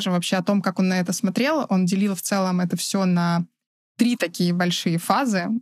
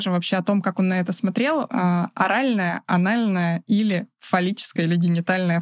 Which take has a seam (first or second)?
second